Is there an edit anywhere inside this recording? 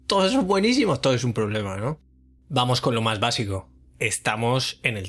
yes; 1 cut; at 2.4 s

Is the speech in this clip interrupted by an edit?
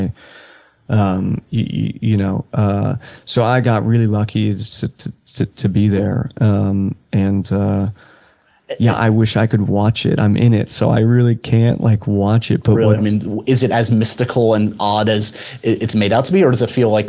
yes; 1 cut; at 13.0 s

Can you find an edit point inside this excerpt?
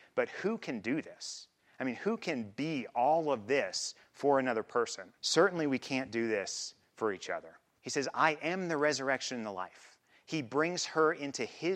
yes; 2 cuts; at 5.2 s, 7.8 s

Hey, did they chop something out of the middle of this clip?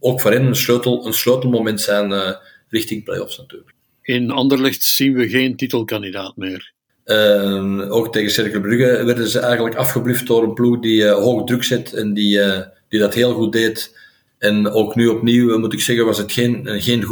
yes; 2 cuts; at 6.9 s, 14.3 s

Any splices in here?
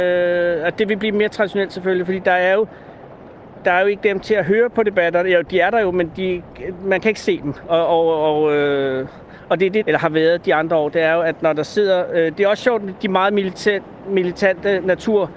yes; 1 cut; at 9.8 s

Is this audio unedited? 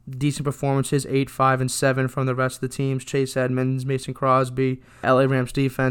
yes; 0 cuts

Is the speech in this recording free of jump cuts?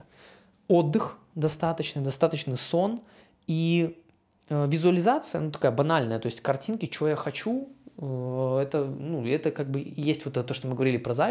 yes; 0 cuts

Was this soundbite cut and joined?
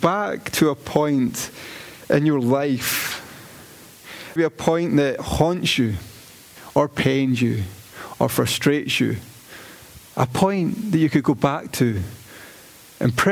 yes; 2 cuts; at 4.4 s, 10.1 s

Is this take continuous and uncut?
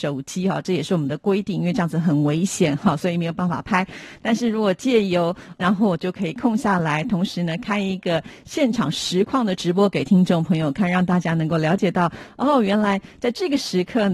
no; 1 cut; at 5.6 s

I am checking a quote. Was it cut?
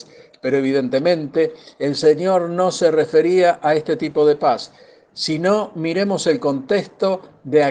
no; 0 cuts

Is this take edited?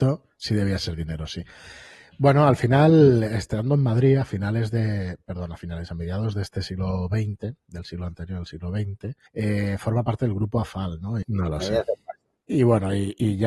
yes; 3 cuts; at 9.3 s, 11.2 s, 12.4 s

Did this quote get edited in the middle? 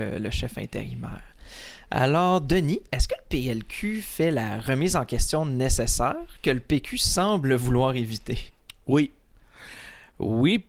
no; 0 cuts

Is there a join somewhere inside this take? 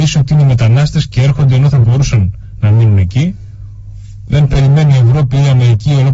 yes; 1 cut; at 4.3 s

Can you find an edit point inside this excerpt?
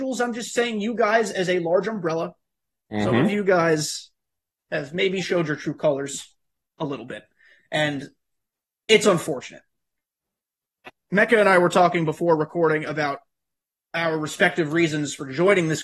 no; 0 cuts

